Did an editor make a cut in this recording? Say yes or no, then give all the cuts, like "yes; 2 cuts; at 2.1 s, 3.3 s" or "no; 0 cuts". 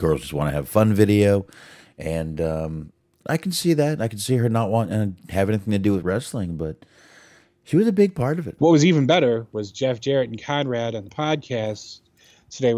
yes; 2 cuts; at 3.2 s, 8.6 s